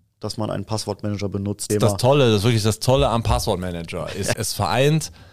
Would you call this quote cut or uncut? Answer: cut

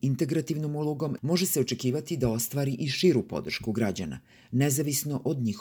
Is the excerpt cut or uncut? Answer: cut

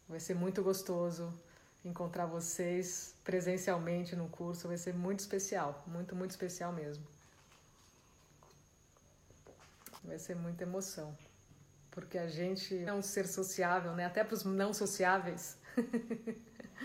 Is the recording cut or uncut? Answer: cut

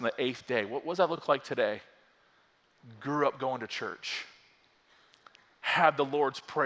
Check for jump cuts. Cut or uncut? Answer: uncut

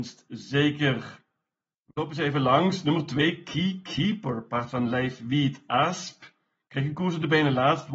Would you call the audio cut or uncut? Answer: uncut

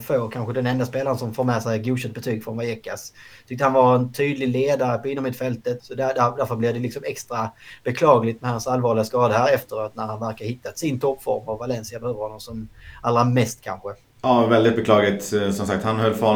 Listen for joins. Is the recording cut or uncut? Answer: cut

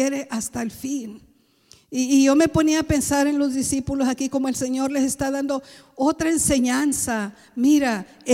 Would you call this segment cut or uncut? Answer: uncut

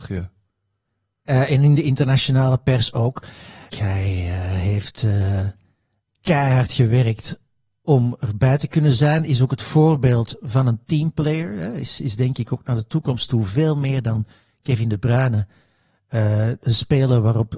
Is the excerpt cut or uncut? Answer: cut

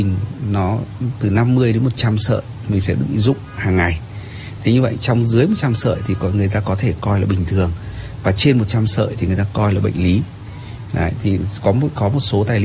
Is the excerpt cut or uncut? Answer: cut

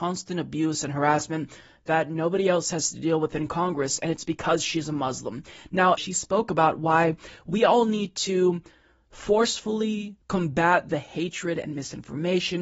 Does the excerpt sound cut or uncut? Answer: cut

